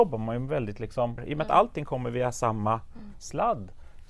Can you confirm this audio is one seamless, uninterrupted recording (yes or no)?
no